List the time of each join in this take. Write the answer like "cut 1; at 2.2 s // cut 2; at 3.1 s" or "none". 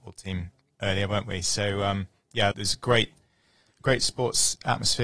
cut 1; at 2.5 s

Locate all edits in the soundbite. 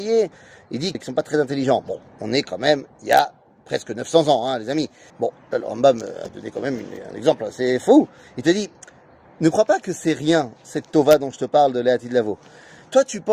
cut 1; at 0.9 s // cut 2; at 5.1 s

